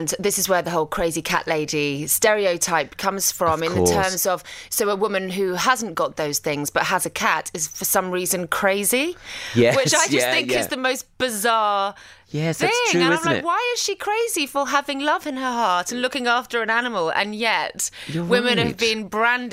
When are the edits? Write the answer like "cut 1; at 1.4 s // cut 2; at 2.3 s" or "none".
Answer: none